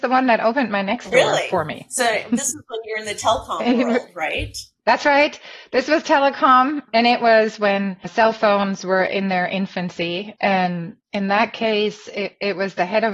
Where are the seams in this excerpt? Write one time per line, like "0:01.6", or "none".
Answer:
0:10.4